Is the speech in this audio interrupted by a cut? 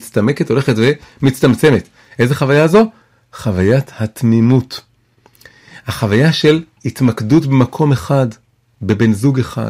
no; 0 cuts

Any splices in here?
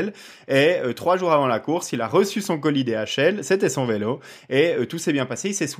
no; 0 cuts

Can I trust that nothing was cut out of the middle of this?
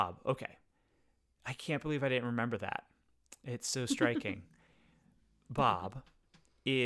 yes; 0 cuts

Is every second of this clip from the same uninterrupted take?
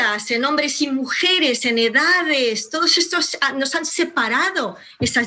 yes; 0 cuts

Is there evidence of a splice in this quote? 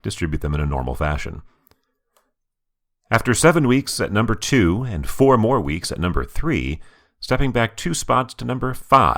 no; 0 cuts

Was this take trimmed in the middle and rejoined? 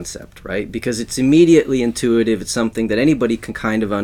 no; 0 cuts

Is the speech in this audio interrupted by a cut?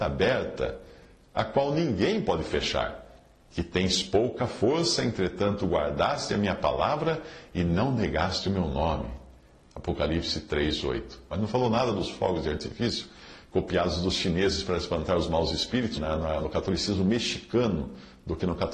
yes; 2 cuts; at 11.3 s, 16.0 s

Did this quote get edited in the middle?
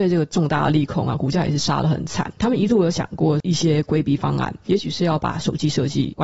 no; 0 cuts

